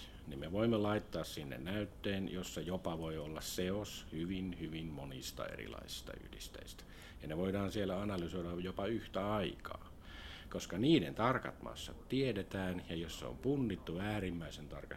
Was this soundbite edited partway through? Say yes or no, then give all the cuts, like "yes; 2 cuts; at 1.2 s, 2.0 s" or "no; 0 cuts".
yes; 1 cut; at 10.5 s